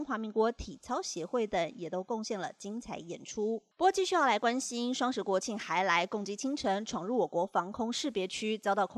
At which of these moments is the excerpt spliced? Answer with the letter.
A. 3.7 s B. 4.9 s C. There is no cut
A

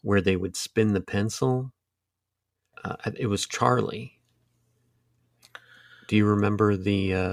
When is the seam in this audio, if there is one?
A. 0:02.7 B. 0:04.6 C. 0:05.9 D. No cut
A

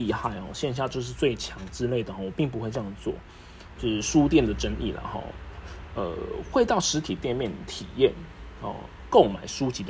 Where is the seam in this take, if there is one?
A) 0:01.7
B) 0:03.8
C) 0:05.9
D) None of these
B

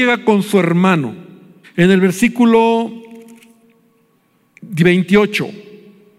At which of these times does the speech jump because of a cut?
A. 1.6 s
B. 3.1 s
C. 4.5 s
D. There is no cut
A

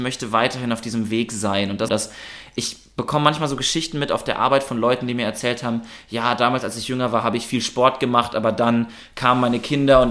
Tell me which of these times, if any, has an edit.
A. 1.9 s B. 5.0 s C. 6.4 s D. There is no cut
A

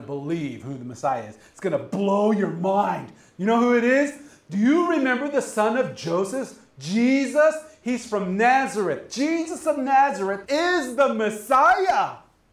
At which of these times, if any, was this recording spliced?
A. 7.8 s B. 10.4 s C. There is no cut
B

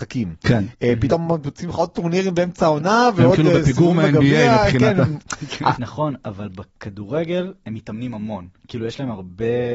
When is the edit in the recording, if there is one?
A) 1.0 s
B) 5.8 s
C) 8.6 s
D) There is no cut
B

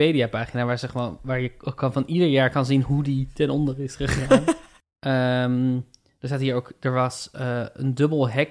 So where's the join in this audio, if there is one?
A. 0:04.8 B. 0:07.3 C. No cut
A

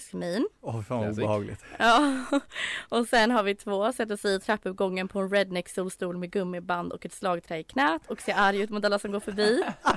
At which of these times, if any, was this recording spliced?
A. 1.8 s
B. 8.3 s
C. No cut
C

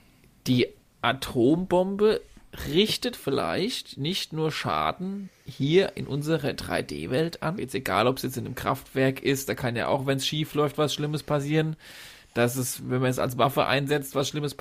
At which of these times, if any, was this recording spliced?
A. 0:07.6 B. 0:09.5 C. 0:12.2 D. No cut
A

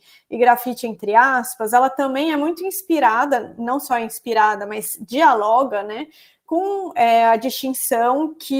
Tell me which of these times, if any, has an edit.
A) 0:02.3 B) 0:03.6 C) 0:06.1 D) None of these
D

